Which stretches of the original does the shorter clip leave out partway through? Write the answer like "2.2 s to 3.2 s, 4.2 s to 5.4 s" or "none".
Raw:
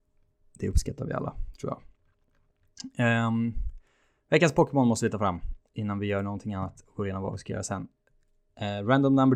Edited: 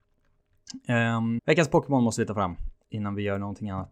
3.5 s to 4.2 s